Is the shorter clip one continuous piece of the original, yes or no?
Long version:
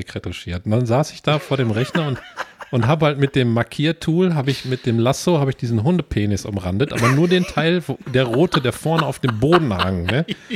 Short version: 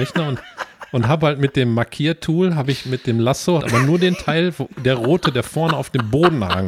no